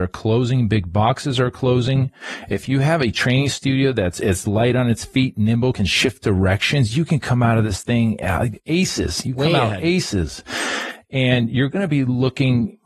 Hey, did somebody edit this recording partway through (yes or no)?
no